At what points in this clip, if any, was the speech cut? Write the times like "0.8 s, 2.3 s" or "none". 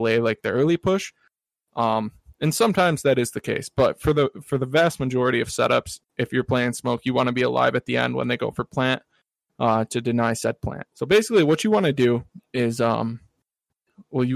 10.9 s